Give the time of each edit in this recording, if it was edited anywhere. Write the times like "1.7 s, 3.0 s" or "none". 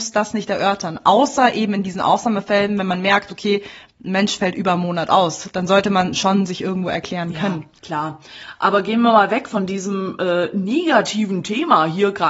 7.8 s